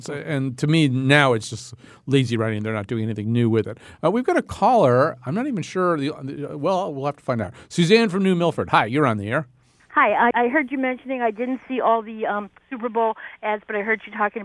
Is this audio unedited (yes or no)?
no